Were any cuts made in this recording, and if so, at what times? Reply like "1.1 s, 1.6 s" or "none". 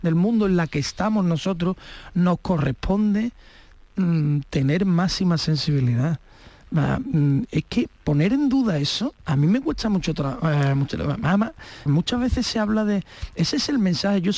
9.2 s, 11.9 s